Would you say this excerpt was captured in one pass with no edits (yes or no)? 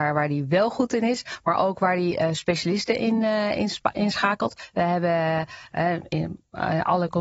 yes